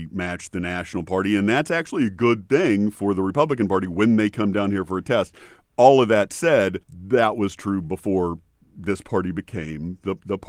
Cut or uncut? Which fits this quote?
cut